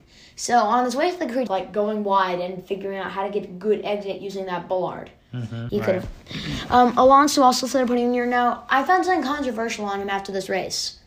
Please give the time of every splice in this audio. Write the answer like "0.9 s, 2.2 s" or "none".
1.5 s, 5.7 s